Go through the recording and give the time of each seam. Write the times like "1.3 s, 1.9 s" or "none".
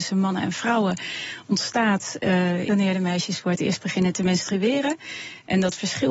2.7 s